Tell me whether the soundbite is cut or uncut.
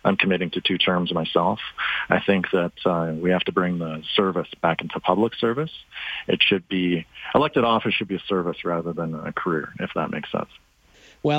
uncut